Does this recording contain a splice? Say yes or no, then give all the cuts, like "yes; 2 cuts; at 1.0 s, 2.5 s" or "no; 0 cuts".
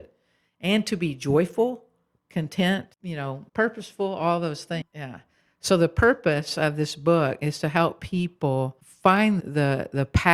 yes; 3 cuts; at 3.5 s, 4.8 s, 9.4 s